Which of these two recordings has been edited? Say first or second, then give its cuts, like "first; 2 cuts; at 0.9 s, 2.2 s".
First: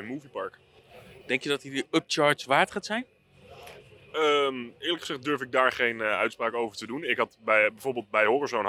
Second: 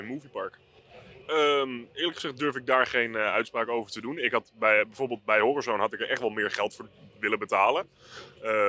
second; 1 cut; at 1.2 s